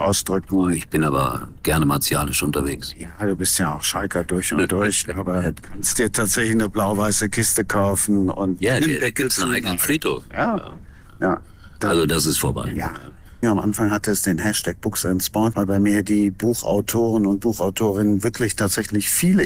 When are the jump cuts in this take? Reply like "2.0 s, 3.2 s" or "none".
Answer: 13.4 s, 15.5 s